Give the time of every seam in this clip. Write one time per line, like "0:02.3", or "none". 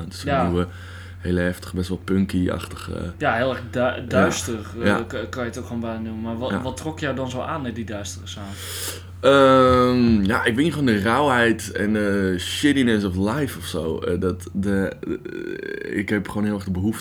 none